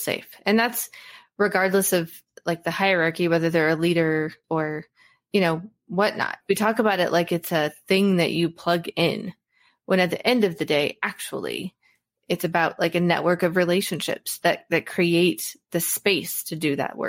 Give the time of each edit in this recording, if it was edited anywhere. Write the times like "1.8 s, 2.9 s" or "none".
4.4 s, 6.4 s